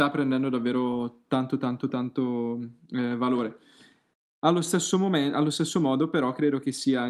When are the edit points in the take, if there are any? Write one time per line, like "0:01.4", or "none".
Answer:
none